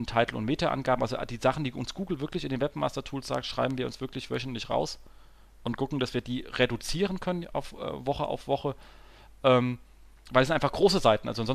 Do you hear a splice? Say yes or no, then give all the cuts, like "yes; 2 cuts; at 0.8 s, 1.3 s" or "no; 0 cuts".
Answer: no; 0 cuts